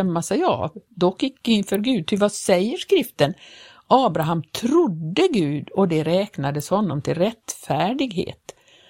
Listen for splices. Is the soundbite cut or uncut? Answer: uncut